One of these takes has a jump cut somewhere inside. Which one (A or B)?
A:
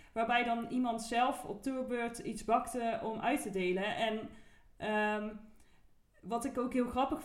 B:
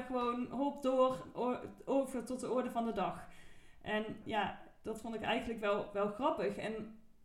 B